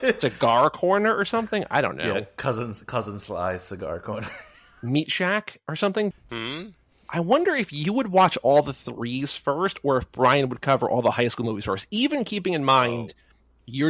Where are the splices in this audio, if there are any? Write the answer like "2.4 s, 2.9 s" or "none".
6.1 s